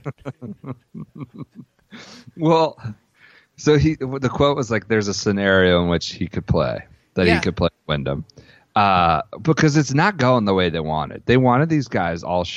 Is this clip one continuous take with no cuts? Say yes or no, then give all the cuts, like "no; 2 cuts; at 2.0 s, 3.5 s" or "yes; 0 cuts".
yes; 0 cuts